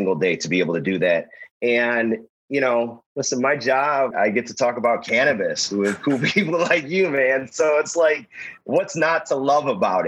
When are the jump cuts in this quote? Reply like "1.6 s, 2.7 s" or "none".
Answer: 4.1 s